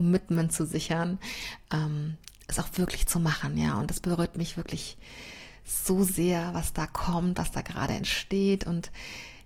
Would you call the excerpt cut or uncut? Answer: uncut